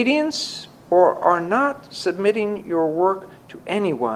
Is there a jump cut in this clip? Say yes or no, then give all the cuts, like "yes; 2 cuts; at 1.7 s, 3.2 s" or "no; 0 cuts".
no; 0 cuts